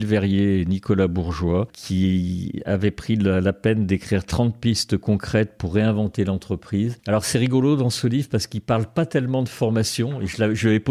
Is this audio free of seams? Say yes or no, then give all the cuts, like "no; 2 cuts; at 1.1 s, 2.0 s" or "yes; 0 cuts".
yes; 0 cuts